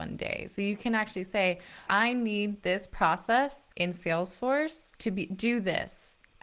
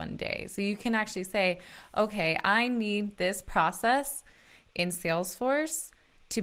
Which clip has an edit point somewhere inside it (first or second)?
first